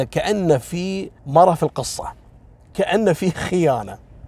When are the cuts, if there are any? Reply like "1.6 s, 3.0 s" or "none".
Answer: 1.2 s